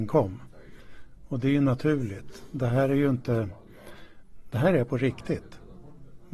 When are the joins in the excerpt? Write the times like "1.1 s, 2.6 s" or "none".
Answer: none